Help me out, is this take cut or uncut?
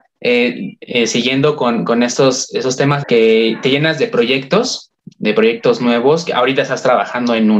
cut